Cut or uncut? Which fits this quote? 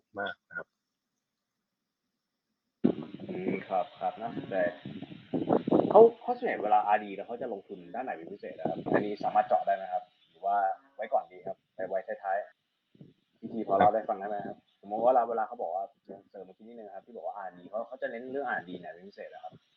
cut